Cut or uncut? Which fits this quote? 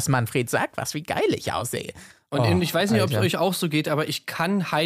uncut